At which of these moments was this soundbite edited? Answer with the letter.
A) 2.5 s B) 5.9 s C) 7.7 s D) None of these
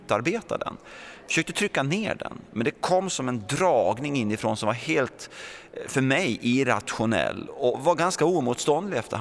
C